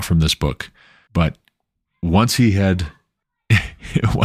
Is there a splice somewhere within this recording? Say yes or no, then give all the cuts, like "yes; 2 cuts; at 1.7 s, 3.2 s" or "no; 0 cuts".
yes; 1 cut; at 1.1 s